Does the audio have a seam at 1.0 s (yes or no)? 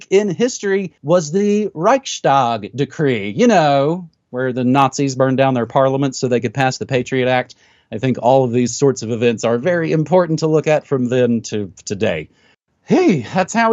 yes